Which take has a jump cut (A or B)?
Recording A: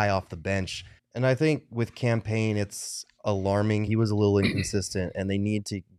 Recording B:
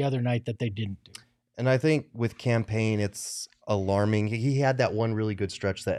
A